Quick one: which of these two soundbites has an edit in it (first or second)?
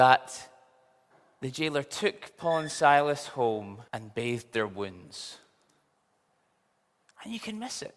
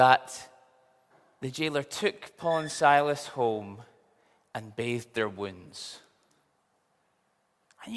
first